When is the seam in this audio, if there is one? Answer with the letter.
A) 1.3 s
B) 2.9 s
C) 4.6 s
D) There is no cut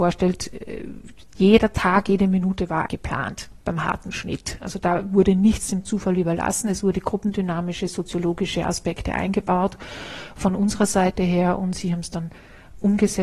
B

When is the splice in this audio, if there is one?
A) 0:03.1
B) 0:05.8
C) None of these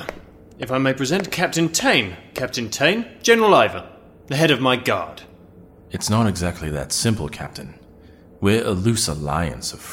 B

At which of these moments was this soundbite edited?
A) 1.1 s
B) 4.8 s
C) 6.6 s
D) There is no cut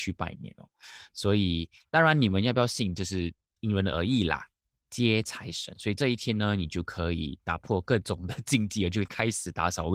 B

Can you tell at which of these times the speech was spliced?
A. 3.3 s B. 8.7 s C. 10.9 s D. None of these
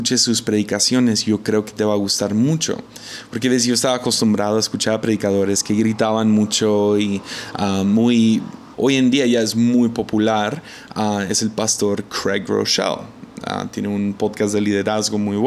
B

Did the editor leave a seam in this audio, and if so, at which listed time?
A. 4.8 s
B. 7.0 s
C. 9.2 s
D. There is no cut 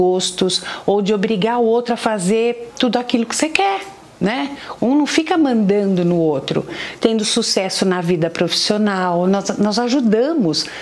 B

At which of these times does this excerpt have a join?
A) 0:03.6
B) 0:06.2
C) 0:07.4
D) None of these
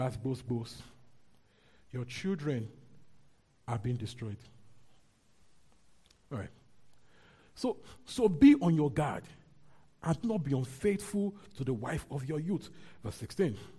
D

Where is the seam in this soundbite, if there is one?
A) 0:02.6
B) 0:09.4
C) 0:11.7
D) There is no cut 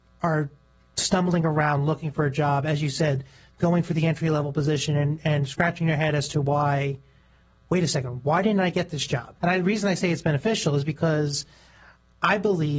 B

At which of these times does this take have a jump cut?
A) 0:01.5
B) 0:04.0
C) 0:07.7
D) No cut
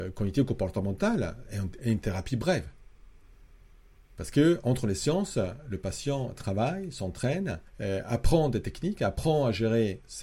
C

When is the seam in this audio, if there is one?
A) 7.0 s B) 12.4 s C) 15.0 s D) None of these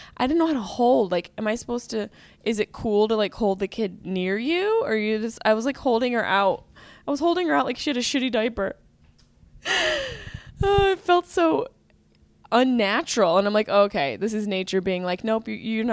D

